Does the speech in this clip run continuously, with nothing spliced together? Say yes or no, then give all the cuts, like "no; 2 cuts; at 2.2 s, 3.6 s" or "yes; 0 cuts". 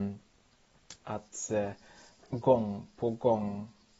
no; 1 cut; at 0.9 s